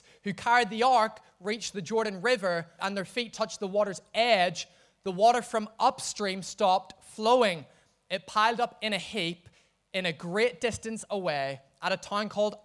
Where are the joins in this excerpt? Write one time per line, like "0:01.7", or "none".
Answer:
0:02.8